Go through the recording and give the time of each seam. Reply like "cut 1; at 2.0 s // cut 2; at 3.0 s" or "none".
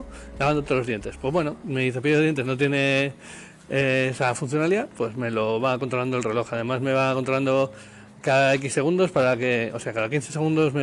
none